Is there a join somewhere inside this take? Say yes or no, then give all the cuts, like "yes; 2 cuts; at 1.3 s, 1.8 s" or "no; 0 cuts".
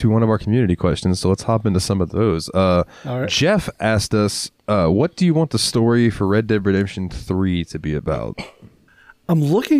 no; 0 cuts